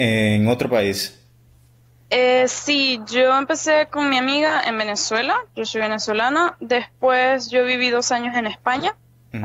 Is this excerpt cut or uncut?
uncut